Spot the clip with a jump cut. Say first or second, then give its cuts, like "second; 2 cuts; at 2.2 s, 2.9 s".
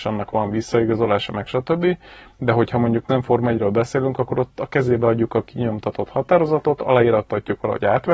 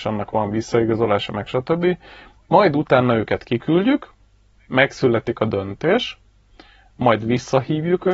second; 1 cut; at 2.4 s